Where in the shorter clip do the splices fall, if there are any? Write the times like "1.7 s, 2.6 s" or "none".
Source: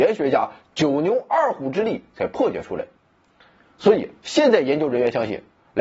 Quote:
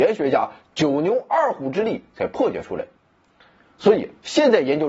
none